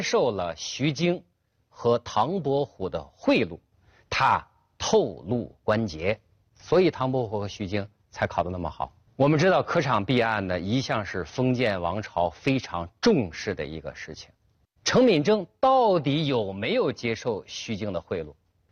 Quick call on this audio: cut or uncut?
cut